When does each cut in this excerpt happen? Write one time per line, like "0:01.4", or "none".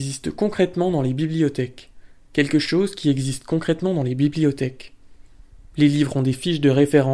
none